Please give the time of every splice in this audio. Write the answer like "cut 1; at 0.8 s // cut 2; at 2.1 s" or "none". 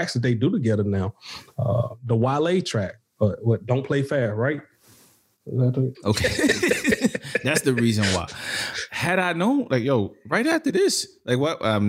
cut 1; at 5.9 s